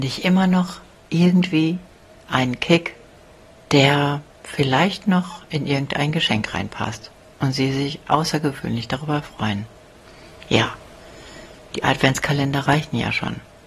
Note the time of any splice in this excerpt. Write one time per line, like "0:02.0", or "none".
none